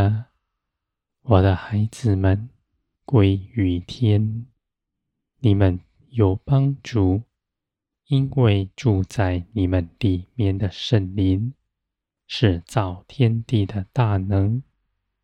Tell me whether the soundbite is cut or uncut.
cut